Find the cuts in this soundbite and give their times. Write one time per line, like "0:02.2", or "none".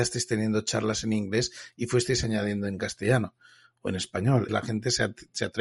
0:04.5